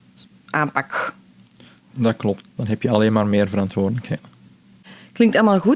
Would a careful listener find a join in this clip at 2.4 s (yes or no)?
yes